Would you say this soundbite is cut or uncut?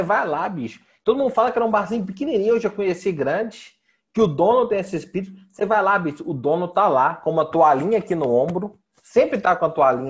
uncut